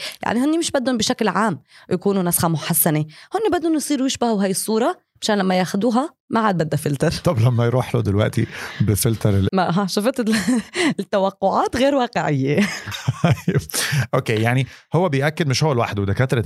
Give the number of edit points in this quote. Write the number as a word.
one